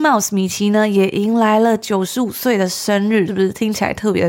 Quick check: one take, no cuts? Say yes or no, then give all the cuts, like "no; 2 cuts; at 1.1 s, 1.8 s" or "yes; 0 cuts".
no; 1 cut; at 3.3 s